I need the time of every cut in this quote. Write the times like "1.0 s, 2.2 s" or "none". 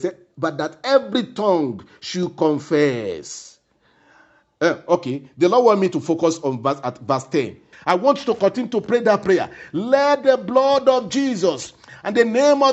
7.7 s

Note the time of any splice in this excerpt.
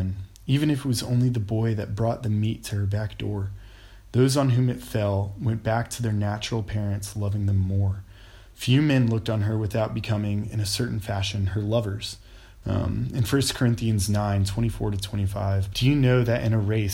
4.1 s, 12.6 s, 15.7 s

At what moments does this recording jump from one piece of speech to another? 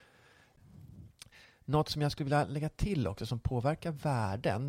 none

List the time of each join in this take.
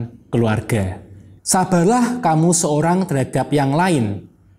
1.4 s

